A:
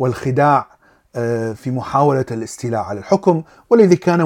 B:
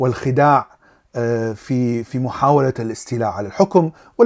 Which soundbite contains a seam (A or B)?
A